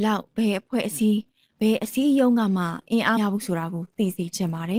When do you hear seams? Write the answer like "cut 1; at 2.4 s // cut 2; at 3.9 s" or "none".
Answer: cut 1; at 3.2 s